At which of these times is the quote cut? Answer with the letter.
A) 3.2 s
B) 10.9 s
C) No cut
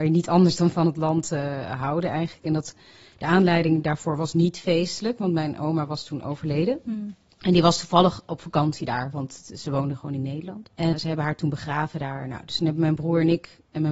B